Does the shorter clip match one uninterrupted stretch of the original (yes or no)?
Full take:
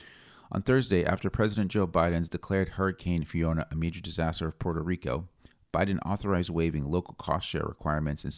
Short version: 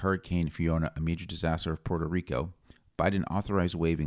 yes